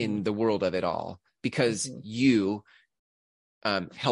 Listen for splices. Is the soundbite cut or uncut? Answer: uncut